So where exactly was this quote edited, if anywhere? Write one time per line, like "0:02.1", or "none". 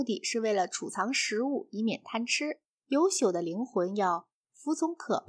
0:02.8